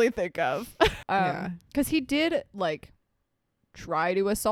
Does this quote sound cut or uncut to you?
cut